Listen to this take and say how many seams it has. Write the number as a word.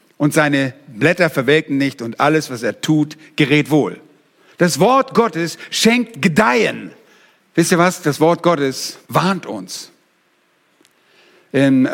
two